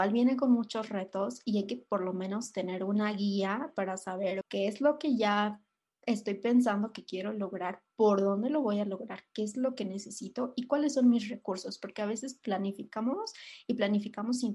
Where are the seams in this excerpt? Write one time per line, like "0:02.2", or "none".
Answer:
0:04.4